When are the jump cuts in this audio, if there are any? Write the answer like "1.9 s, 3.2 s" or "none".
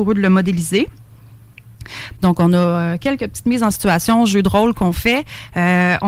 2.2 s